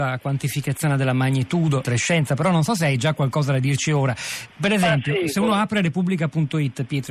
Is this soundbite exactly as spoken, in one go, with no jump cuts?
no; 1 cut; at 1.8 s

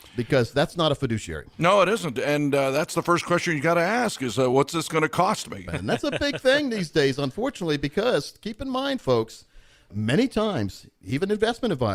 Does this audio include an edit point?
yes; 1 cut; at 5.7 s

